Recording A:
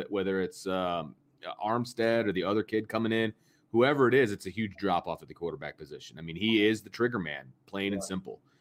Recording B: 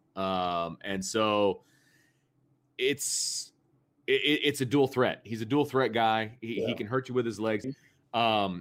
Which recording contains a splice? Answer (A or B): B